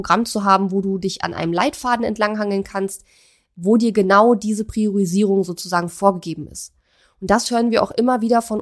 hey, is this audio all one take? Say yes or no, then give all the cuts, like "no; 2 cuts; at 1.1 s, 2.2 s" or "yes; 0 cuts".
yes; 0 cuts